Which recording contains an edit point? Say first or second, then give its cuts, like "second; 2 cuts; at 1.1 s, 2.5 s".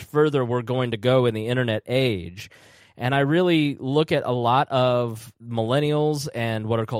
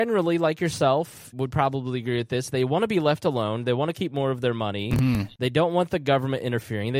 second; 1 cut; at 1.3 s